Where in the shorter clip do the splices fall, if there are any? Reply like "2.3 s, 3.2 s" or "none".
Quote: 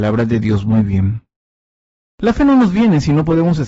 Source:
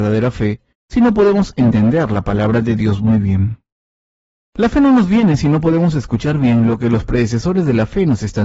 none